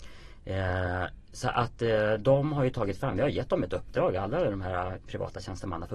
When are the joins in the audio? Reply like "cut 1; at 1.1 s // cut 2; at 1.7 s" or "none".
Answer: none